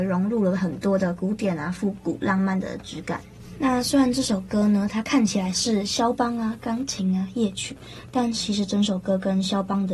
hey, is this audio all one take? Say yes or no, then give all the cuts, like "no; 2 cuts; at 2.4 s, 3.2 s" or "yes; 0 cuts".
yes; 0 cuts